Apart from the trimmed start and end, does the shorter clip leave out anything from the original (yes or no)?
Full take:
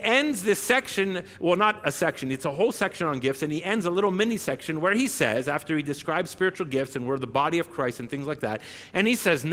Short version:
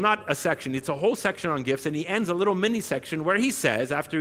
no